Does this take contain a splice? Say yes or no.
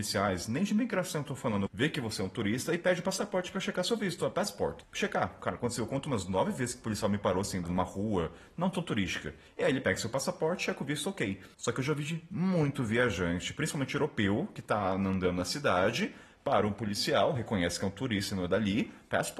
yes